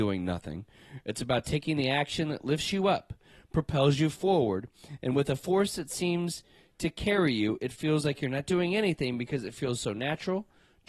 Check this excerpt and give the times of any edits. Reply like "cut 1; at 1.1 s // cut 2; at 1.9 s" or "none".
none